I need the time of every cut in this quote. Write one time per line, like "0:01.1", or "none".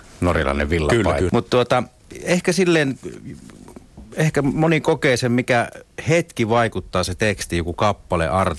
0:01.3